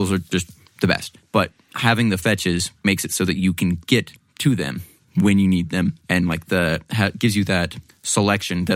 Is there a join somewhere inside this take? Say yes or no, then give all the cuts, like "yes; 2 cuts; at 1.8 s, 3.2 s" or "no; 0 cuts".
yes; 1 cut; at 6.0 s